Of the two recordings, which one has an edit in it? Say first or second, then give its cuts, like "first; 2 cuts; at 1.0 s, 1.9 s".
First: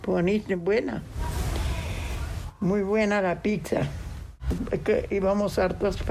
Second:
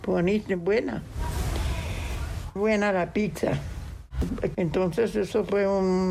second; 2 cuts; at 2.6 s, 4.5 s